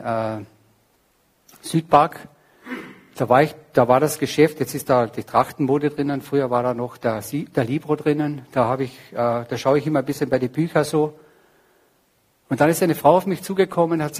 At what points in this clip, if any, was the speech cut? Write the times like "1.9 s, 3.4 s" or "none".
none